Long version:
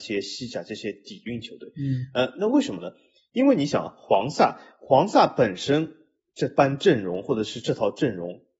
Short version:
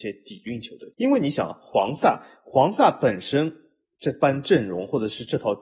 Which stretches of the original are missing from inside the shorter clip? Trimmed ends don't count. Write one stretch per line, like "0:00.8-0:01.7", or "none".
0:01.7-0:03.3